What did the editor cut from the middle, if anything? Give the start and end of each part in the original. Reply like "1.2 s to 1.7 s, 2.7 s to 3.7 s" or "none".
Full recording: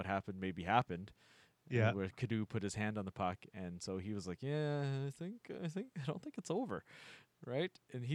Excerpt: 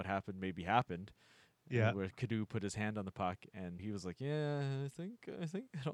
3.8 s to 4.0 s